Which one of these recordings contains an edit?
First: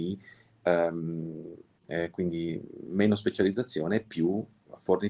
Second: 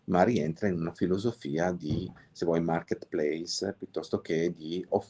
first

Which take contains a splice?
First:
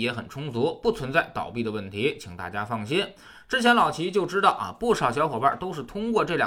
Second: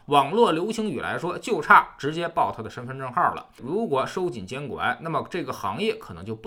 second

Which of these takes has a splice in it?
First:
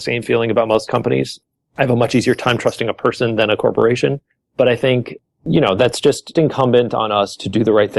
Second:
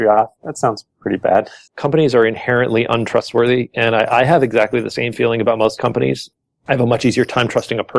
second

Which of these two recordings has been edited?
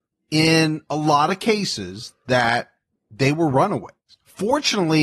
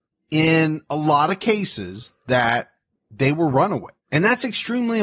second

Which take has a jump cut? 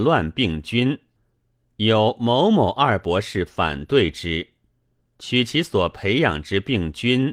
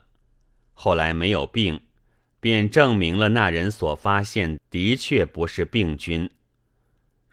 second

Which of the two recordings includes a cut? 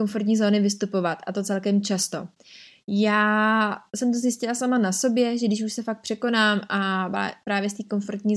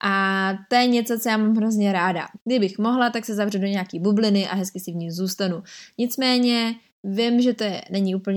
second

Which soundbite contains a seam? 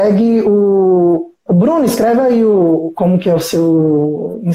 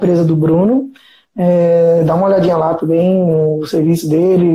first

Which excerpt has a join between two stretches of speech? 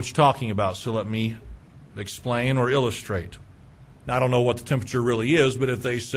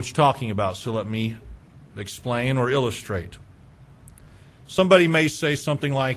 first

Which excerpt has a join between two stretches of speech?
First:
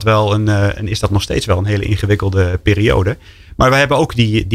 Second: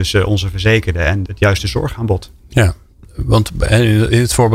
second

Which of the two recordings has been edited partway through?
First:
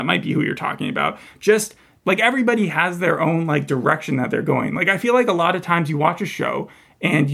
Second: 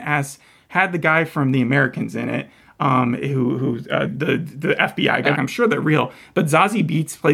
second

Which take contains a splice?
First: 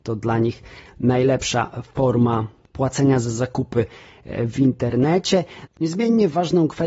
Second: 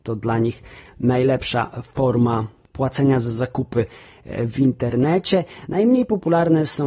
first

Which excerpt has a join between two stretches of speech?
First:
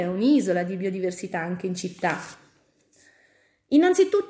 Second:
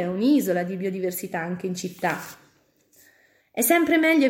second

